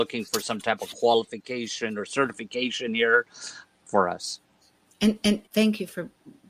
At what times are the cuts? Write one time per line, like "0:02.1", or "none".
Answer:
0:03.6
0:05.5

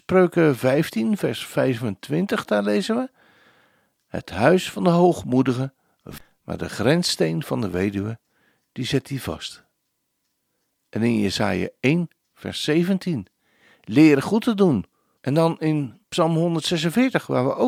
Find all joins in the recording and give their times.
0:15.2

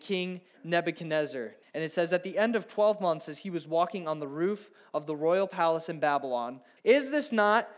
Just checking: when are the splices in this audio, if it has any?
0:01.6
0:06.8

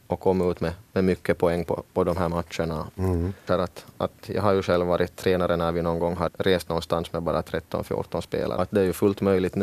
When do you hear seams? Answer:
0:03.5
0:06.3
0:08.6

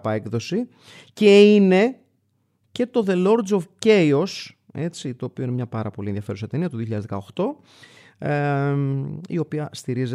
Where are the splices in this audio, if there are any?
none

